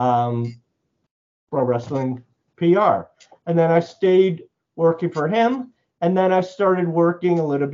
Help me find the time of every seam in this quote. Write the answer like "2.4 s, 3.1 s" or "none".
none